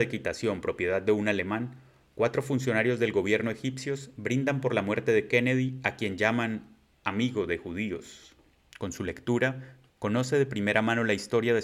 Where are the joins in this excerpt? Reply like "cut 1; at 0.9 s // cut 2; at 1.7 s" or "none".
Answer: cut 1; at 8.7 s // cut 2; at 9.9 s